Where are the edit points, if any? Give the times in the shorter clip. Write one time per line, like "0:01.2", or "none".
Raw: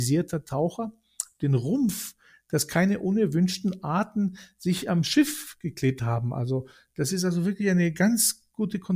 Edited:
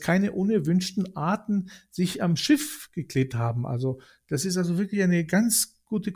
none